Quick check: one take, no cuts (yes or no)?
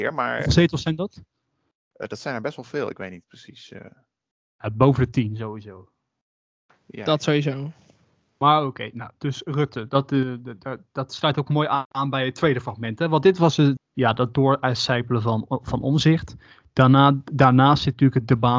no